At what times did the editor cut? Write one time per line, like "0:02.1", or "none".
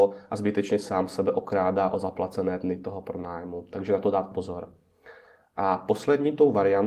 none